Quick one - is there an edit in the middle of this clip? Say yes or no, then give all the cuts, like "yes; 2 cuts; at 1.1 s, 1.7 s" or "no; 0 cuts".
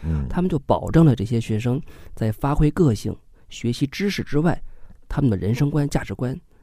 no; 0 cuts